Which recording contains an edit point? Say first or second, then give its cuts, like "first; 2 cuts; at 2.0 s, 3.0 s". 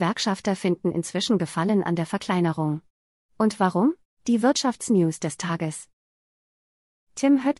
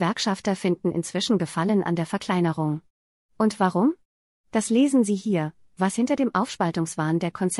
first; 1 cut; at 4.1 s